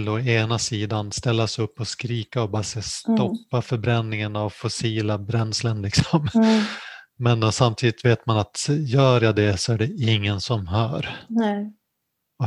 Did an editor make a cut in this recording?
no; 0 cuts

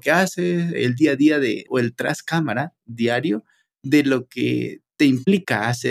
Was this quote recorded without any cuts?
no; 1 cut; at 1.7 s

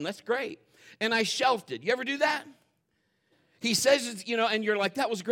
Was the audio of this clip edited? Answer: no; 0 cuts

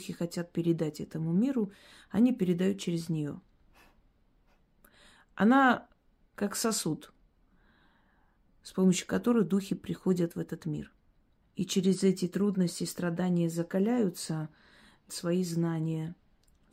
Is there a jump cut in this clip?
yes; 2 cuts; at 11.4 s, 15.1 s

